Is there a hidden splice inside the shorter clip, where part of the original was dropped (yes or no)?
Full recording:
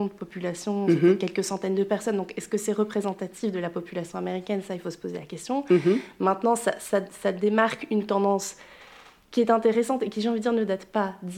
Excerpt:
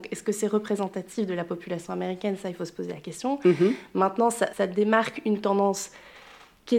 yes